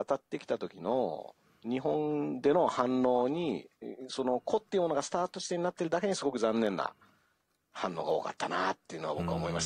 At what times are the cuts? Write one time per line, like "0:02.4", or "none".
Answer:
none